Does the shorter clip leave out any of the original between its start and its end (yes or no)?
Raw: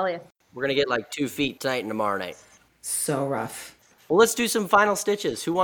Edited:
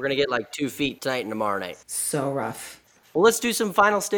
yes